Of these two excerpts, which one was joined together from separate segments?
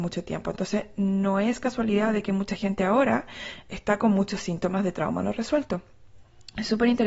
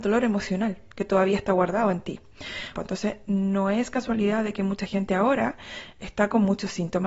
second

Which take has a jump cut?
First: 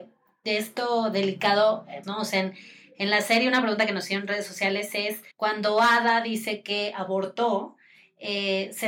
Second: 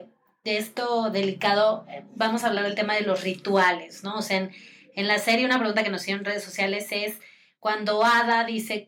first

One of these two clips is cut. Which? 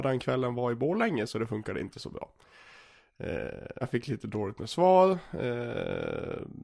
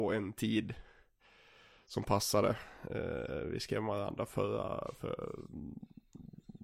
first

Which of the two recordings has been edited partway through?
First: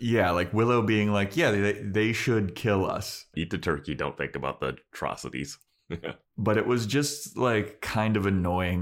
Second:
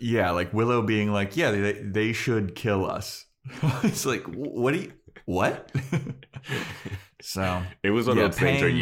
first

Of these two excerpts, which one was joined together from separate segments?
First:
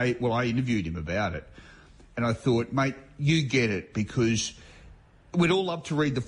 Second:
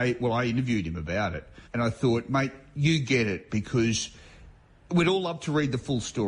second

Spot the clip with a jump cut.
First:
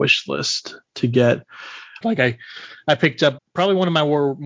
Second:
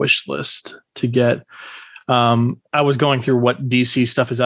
first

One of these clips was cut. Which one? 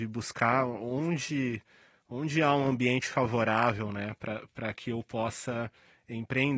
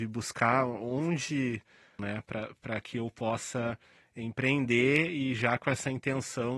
second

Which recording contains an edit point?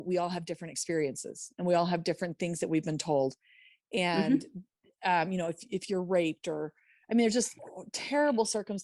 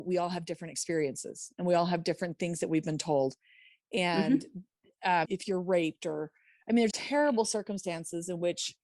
second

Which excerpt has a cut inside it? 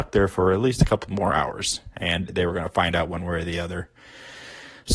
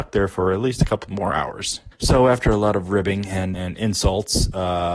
second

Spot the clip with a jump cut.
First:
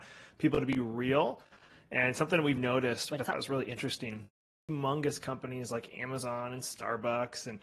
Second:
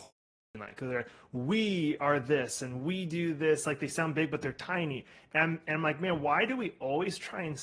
first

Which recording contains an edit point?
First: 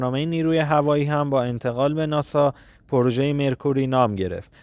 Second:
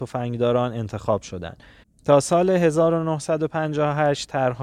second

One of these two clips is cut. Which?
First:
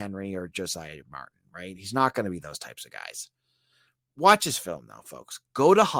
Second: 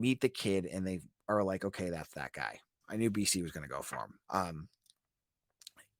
second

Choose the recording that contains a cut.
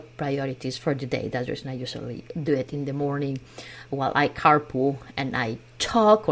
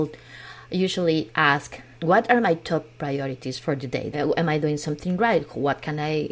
second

